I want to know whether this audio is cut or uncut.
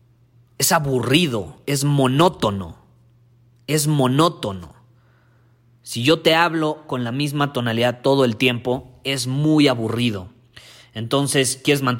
uncut